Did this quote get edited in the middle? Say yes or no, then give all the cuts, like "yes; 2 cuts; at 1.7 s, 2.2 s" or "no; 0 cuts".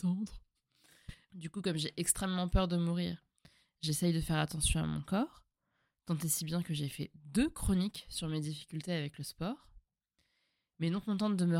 yes; 1 cut; at 1.3 s